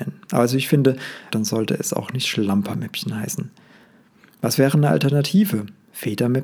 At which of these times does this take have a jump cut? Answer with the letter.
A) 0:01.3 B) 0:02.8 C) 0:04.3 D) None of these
A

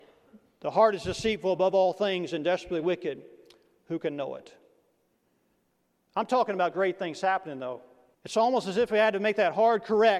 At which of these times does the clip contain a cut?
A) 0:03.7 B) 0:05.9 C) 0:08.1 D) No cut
C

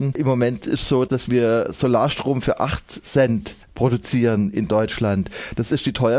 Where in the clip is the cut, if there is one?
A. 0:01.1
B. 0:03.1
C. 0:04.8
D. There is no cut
A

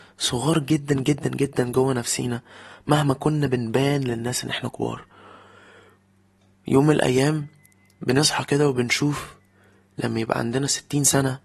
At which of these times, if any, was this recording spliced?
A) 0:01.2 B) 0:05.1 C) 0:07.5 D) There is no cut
A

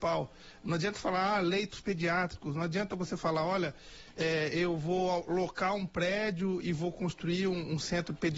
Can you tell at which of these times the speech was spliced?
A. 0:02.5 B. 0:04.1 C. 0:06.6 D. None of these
C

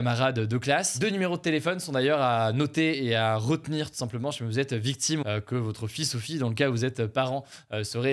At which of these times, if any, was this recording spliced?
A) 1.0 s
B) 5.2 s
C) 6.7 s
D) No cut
B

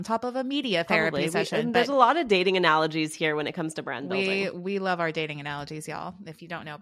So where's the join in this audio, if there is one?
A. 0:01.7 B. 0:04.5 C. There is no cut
C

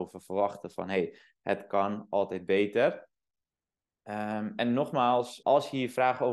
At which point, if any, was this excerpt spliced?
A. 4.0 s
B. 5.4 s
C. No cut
B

